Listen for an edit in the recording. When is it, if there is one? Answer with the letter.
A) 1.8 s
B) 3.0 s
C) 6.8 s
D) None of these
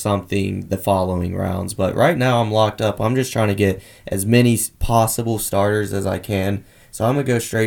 D